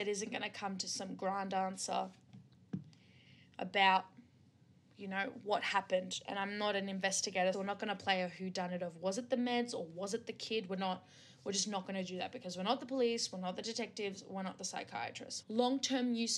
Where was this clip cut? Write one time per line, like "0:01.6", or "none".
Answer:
0:07.5
0:15.4